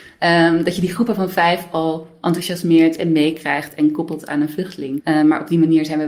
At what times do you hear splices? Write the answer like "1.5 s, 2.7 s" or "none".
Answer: 5.0 s